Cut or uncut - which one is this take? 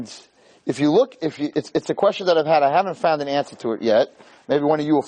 uncut